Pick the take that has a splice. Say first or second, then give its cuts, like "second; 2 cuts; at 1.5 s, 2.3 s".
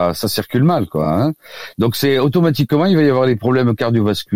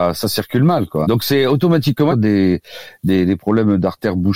second; 2 cuts; at 1.0 s, 2.1 s